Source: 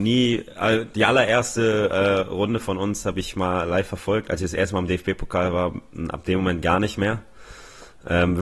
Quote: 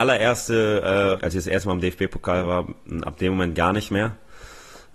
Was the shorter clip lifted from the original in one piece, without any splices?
no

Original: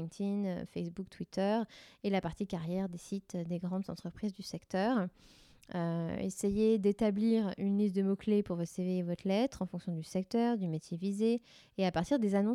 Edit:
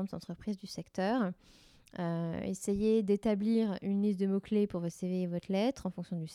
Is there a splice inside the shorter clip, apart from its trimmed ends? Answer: no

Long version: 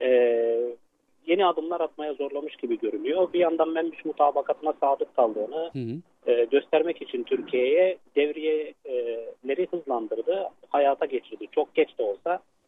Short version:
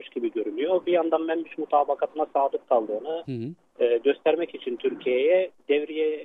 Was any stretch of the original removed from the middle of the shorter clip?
no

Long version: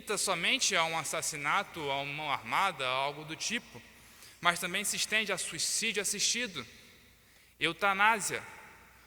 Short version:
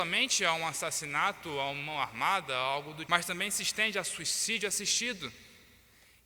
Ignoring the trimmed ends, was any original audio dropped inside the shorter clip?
yes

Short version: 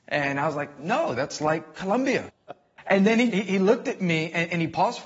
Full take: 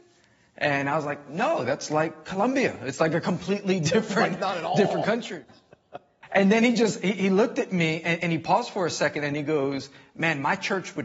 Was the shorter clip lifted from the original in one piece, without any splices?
no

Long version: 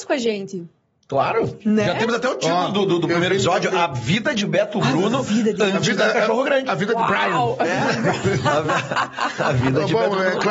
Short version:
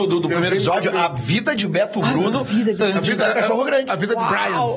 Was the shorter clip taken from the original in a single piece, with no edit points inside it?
yes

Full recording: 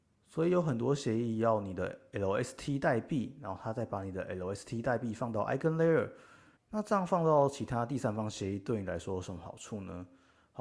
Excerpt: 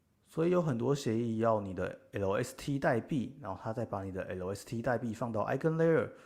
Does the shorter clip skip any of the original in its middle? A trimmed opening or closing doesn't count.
no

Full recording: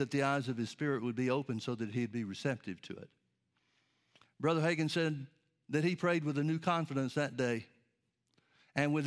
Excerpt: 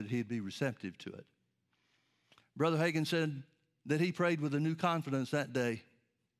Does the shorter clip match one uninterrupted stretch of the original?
yes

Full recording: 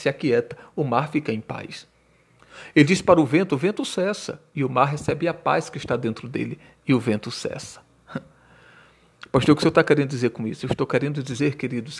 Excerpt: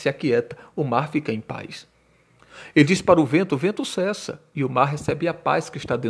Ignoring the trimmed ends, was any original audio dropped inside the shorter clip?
no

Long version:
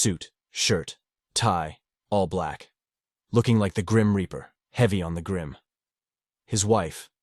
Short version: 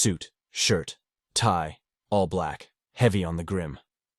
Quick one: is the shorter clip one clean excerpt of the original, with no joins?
no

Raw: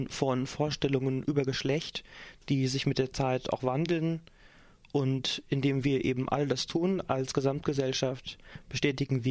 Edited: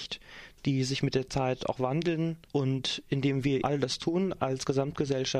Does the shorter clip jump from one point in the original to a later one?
yes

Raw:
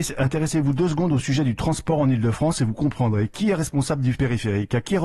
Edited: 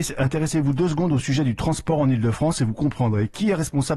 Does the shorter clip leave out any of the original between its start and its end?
no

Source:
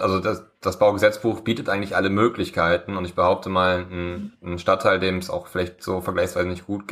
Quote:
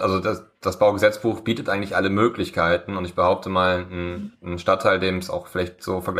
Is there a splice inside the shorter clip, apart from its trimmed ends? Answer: no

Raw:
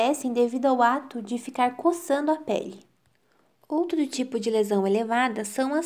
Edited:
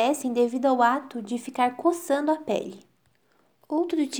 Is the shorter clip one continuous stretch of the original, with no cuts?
yes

